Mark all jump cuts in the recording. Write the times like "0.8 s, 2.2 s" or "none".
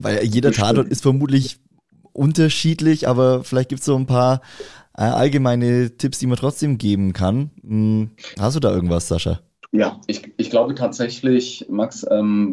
none

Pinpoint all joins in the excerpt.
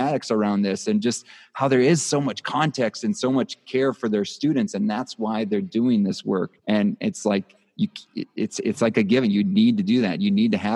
6.6 s

